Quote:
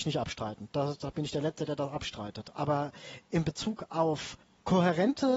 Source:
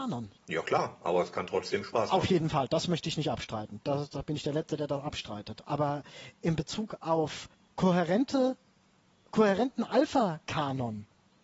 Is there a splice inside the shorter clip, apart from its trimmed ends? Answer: no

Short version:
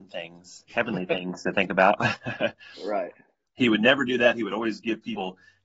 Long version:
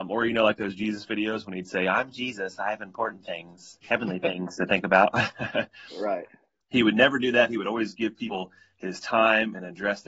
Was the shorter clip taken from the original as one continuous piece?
yes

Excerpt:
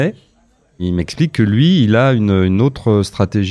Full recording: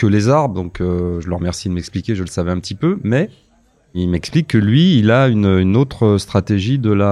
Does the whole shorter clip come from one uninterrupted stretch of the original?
yes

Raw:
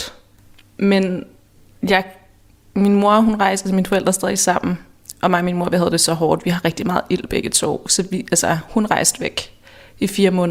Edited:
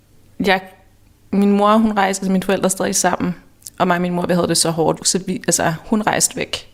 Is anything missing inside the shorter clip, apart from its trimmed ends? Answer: yes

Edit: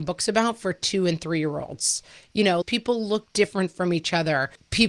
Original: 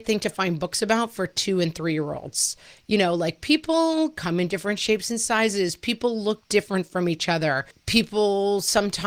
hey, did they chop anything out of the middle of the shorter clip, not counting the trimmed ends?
yes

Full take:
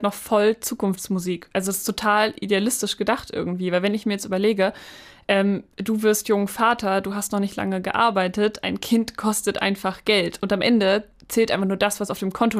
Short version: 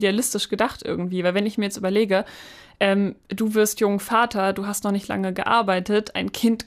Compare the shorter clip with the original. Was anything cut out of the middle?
no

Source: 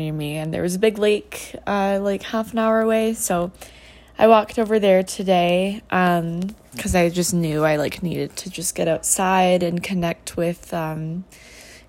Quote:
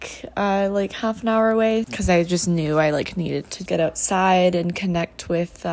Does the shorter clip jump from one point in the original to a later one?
yes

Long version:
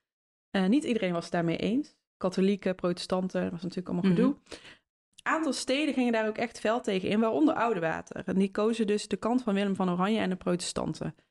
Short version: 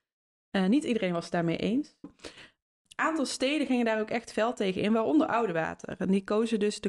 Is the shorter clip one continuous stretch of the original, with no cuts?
no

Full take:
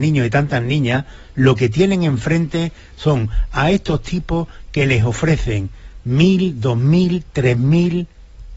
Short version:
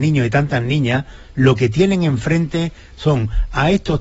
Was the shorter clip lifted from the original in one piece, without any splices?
yes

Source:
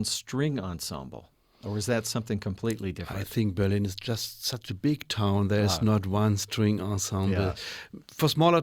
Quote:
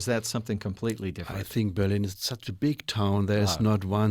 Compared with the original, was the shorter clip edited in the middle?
yes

